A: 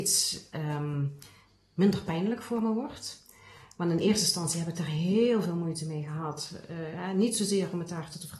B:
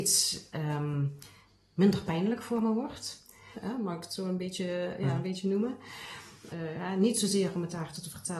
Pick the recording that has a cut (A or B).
B